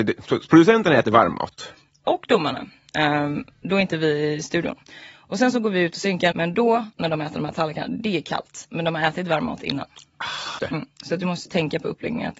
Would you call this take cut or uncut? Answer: cut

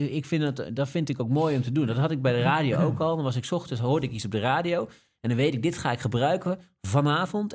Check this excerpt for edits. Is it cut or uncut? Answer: uncut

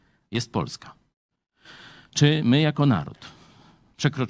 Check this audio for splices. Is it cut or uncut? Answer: uncut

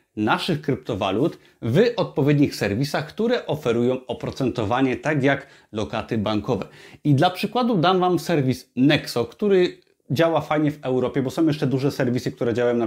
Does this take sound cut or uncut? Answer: uncut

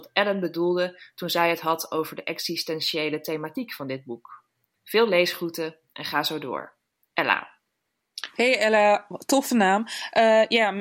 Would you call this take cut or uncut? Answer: uncut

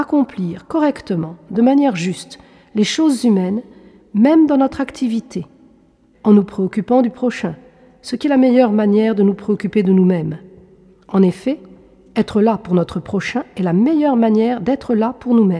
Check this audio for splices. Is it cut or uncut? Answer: cut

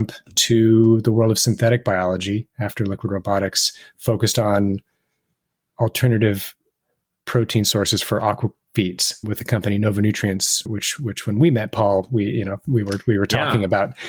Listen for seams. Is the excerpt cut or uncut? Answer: uncut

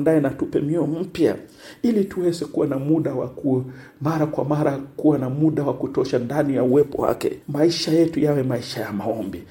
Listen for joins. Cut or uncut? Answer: cut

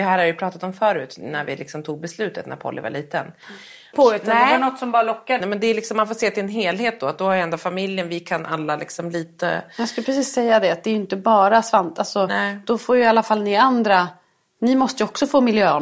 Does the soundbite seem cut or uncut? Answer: cut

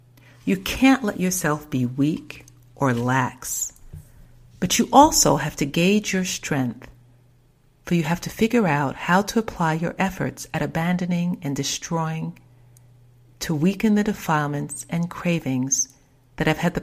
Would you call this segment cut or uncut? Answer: uncut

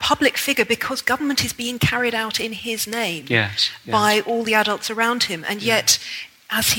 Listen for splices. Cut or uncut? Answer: uncut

